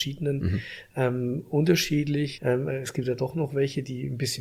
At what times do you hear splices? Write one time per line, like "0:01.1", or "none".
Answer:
0:02.4